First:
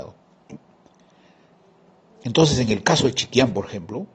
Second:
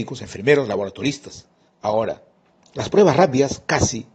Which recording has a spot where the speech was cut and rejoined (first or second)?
second